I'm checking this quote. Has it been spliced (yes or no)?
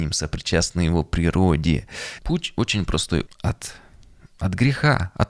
yes